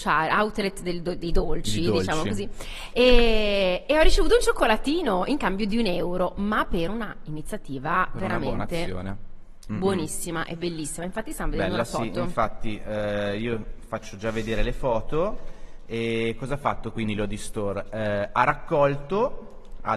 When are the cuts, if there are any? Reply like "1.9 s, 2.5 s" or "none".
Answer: none